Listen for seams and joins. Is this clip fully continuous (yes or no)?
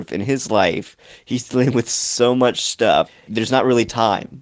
no